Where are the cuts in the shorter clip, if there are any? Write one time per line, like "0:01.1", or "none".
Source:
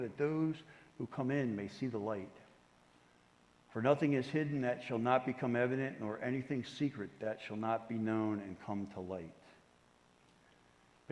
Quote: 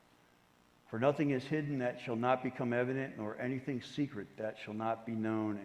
none